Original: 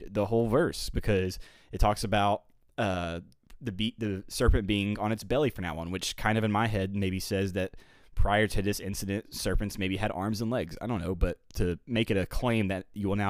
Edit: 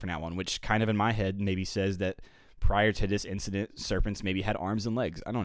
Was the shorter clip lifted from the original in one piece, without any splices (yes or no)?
yes